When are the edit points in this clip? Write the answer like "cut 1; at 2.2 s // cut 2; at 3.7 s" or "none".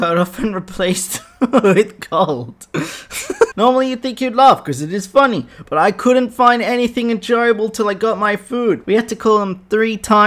cut 1; at 3.5 s // cut 2; at 8.8 s